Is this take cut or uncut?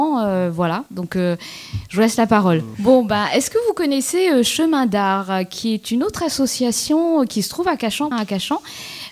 cut